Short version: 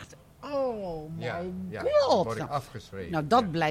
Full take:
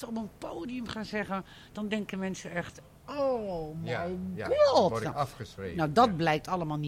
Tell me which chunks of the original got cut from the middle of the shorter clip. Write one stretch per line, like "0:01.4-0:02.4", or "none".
none